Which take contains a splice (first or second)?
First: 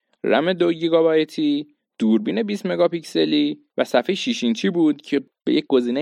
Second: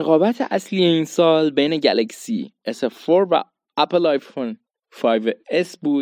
first